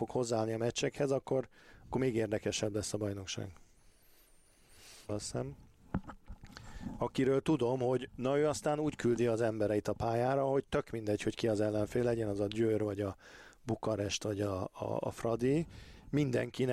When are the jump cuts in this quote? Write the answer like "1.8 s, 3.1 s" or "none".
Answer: 5.1 s